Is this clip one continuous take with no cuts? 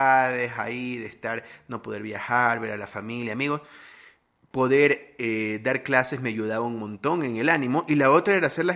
yes; 0 cuts

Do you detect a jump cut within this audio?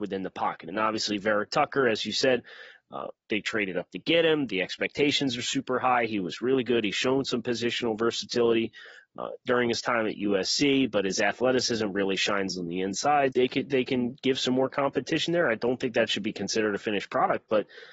yes; 1 cut; at 13.3 s

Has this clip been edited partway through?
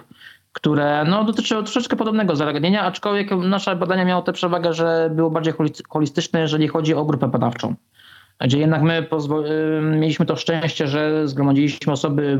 no; 0 cuts

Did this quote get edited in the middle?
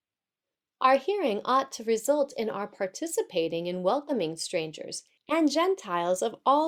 yes; 1 cut; at 5.2 s

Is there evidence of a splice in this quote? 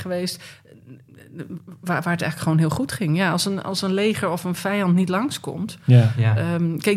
no; 0 cuts

